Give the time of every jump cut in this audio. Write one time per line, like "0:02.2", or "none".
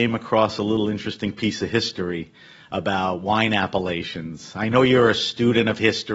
none